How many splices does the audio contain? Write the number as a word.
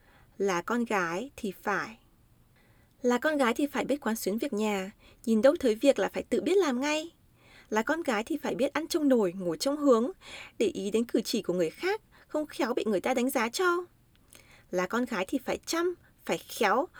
one